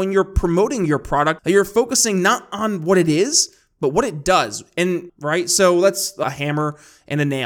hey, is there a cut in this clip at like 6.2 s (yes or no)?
yes